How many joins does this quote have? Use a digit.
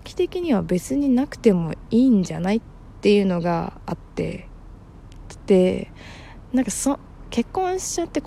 0